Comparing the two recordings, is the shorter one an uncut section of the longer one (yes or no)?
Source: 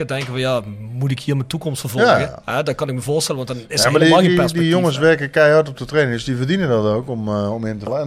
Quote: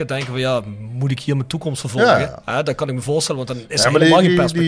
yes